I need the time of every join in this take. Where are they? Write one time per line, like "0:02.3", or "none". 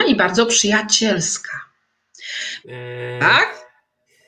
0:02.6